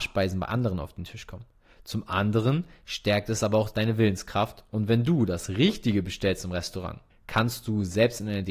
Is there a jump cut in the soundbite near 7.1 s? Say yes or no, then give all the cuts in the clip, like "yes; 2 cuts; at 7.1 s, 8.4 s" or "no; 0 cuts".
yes; 1 cut; at 7.1 s